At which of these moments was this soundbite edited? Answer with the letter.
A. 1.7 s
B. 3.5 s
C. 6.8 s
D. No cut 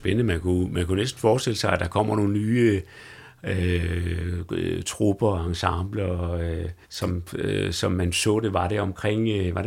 C